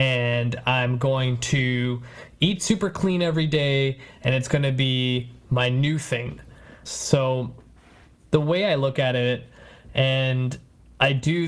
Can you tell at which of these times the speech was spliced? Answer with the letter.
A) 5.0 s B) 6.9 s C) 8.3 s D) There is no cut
B